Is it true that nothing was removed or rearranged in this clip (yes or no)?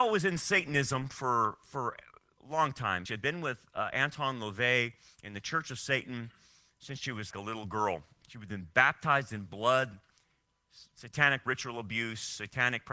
no